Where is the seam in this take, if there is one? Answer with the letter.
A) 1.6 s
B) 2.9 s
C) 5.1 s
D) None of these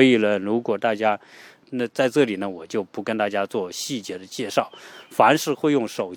A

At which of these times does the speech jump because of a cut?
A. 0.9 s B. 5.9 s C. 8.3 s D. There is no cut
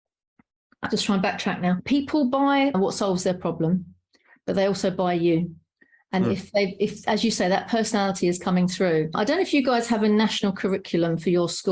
D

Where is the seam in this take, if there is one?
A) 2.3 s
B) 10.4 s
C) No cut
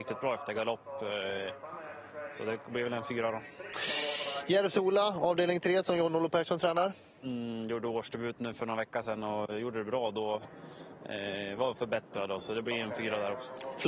B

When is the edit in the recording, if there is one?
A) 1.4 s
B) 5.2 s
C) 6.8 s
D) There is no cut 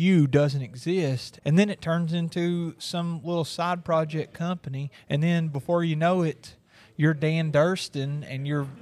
A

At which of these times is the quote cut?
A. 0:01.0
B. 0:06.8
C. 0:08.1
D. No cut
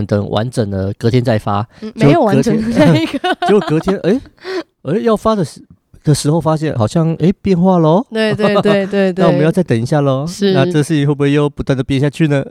B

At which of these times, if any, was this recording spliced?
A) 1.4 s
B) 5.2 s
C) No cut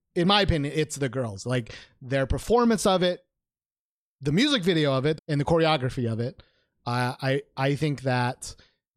B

